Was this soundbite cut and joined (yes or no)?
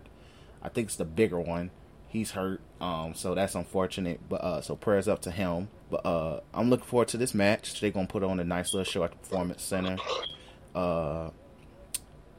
yes